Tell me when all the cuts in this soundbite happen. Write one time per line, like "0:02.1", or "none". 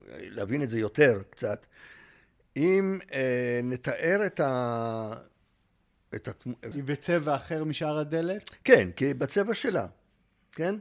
0:06.7